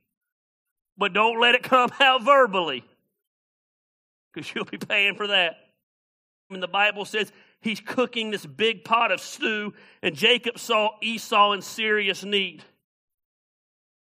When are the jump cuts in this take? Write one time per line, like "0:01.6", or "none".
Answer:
0:06.5